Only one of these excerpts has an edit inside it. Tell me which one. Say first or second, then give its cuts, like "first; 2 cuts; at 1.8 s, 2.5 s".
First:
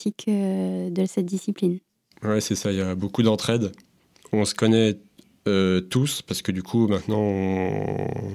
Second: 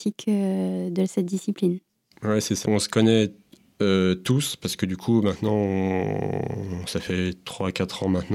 second; 1 cut; at 2.6 s